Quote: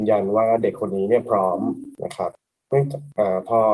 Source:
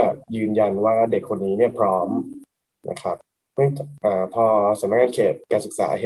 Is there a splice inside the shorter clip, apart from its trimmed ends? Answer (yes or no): yes